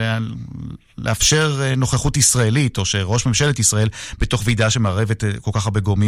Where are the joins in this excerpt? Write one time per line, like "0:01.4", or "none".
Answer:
none